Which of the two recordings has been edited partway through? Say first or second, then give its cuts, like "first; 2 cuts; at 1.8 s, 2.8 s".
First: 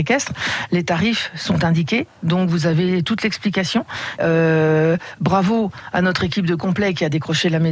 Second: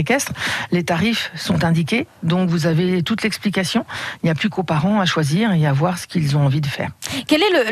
first; 1 cut; at 4.2 s